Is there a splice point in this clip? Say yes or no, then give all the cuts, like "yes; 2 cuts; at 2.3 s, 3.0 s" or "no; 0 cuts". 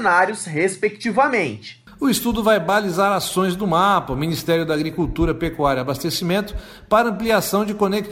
no; 0 cuts